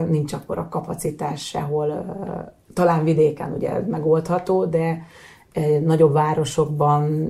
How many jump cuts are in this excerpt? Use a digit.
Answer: 0